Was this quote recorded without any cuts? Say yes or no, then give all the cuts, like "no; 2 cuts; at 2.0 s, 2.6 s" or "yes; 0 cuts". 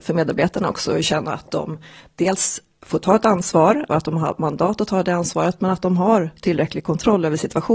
no; 1 cut; at 3.9 s